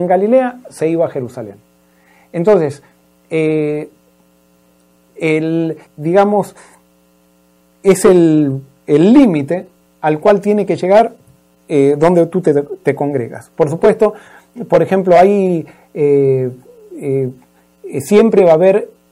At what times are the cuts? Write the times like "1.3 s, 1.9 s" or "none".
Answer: 5.9 s